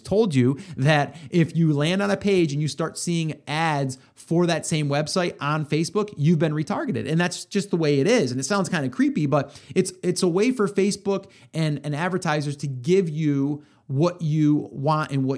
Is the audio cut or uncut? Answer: uncut